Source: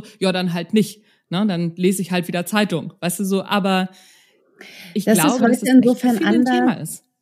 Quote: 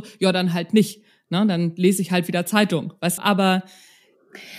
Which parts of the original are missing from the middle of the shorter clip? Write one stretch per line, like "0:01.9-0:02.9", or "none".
0:03.2-0:03.4